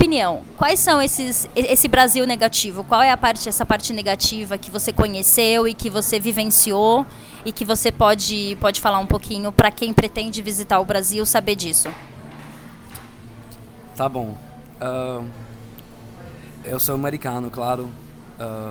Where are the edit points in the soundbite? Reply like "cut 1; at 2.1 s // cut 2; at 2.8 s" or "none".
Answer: cut 1; at 16.6 s